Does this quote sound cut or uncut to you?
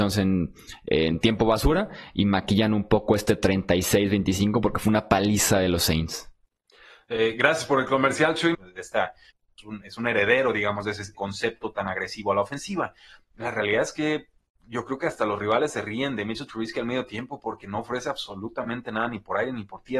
cut